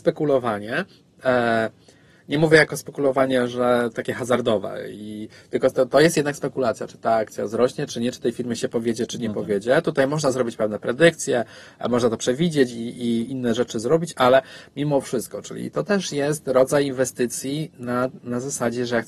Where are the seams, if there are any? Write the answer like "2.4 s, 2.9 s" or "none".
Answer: none